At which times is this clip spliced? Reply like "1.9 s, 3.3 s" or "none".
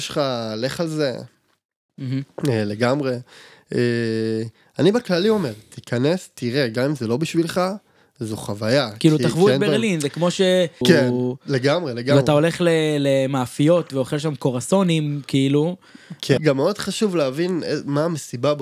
10.8 s, 16.4 s